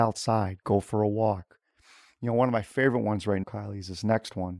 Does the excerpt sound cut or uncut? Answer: cut